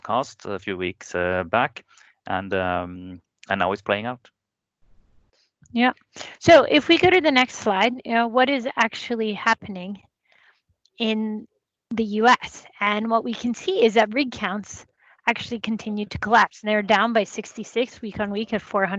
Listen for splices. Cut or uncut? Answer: uncut